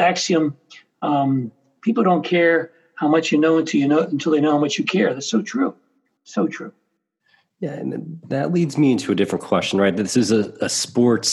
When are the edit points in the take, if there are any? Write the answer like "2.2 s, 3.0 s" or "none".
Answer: none